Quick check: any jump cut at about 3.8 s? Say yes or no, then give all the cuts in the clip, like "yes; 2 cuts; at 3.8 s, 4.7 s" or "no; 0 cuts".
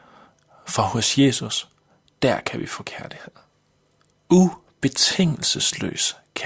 no; 0 cuts